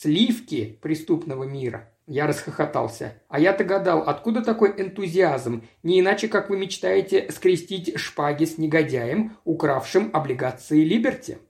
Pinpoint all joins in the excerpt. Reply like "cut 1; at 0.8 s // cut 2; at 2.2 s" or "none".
cut 1; at 2.0 s // cut 2; at 3.3 s